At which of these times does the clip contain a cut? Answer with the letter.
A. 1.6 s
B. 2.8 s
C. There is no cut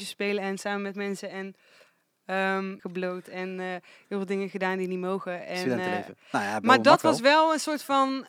B